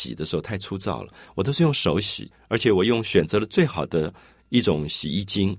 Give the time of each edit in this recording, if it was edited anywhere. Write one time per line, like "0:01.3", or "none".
none